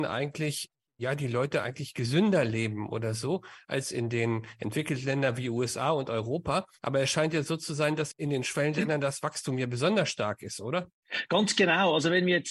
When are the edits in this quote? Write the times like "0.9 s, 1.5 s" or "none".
none